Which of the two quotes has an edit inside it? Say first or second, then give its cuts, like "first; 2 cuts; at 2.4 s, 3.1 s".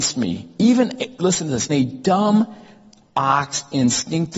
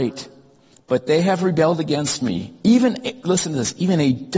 first; 1 cut; at 1.7 s